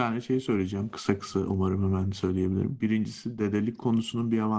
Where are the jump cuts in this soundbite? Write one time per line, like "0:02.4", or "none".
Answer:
none